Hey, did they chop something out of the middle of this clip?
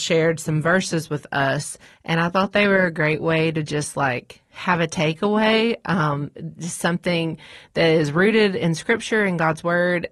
no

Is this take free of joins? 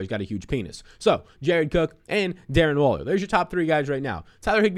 no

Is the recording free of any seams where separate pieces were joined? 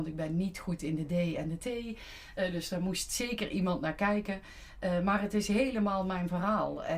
yes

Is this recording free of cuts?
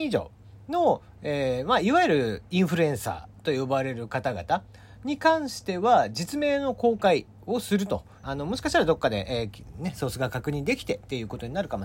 no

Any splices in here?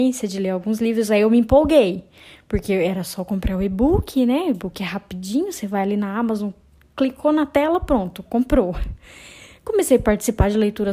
no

